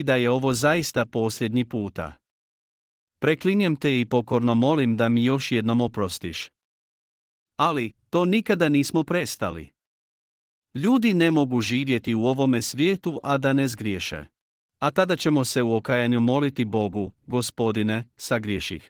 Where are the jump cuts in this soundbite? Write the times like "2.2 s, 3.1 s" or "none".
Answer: 14.6 s